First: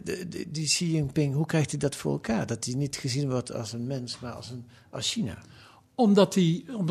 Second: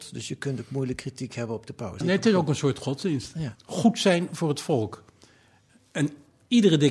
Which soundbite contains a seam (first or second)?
second